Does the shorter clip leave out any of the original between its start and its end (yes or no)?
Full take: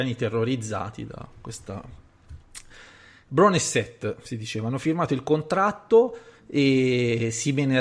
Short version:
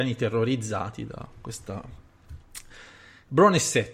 no